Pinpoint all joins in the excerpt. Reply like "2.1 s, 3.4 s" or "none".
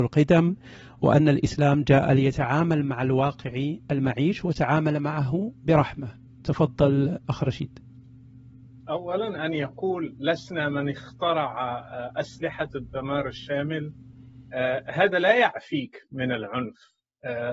none